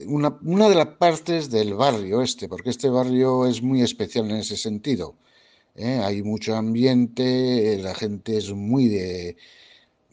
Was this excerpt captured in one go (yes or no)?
yes